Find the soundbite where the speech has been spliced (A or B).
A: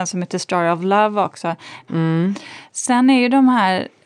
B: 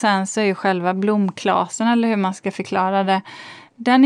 A